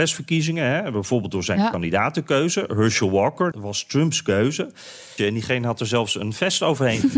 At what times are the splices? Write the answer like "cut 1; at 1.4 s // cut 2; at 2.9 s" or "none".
cut 1; at 3.5 s // cut 2; at 5.2 s